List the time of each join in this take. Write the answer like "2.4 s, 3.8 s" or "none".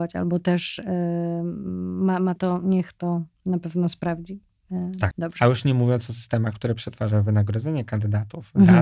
2.4 s, 5.1 s